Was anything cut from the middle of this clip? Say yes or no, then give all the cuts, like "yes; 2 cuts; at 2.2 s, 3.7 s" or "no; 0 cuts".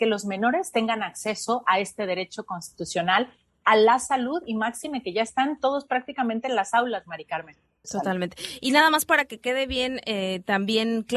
yes; 1 cut; at 7.8 s